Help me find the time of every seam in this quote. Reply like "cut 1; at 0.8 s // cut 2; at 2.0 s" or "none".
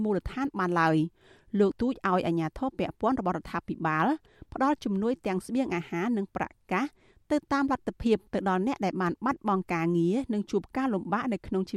cut 1; at 1.7 s